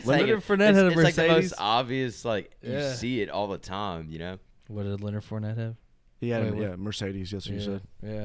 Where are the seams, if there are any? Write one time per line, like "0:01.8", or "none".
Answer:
none